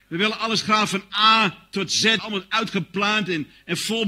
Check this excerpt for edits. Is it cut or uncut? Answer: cut